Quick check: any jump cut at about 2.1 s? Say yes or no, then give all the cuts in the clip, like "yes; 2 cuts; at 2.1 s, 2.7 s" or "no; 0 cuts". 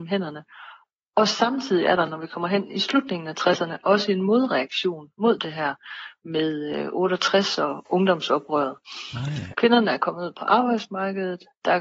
no; 1 cut; at 9.5 s